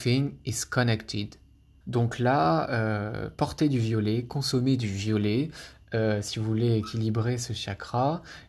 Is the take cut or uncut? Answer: cut